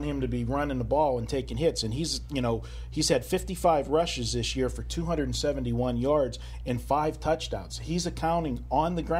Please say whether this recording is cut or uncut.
uncut